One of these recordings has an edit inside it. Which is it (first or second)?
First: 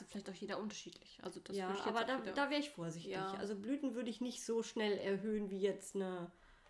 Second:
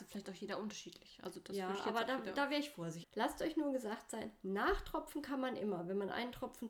second